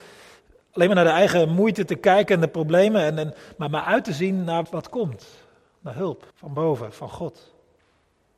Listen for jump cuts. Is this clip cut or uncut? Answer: cut